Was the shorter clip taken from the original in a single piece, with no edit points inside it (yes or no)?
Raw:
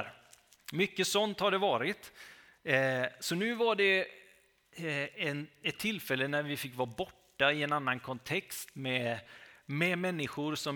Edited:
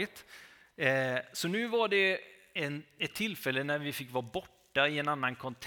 no